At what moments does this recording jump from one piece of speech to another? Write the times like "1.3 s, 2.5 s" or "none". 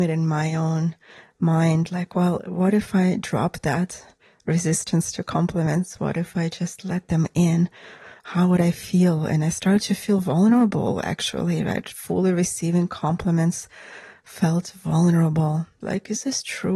15.8 s